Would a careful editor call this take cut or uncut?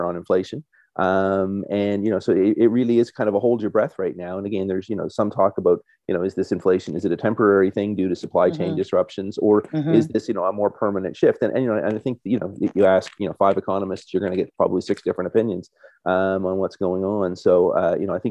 uncut